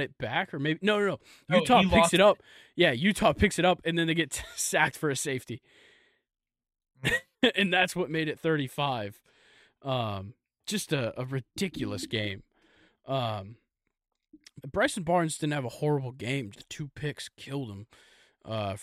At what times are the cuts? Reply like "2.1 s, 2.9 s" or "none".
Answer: 14.6 s, 16.5 s